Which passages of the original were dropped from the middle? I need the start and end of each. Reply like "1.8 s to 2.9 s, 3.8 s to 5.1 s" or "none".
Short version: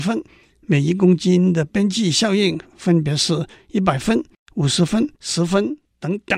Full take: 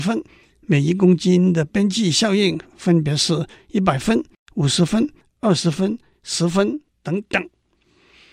5.2 s to 6.2 s